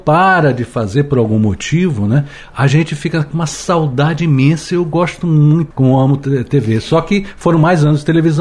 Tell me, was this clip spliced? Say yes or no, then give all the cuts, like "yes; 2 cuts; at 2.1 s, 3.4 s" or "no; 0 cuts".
yes; 1 cut; at 5.7 s